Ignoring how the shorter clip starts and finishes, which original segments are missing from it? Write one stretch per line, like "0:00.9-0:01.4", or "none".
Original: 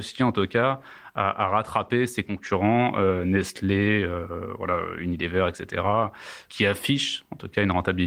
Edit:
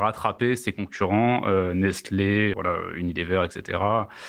0:04.0-0:04.6